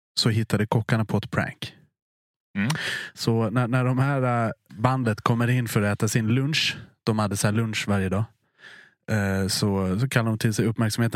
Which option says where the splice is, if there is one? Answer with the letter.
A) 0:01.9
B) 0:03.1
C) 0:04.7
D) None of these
C